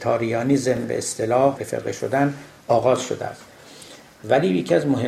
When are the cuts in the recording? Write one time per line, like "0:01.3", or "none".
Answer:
0:01.6